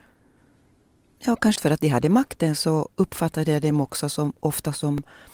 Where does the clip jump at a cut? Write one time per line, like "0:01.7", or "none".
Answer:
0:01.6
0:02.9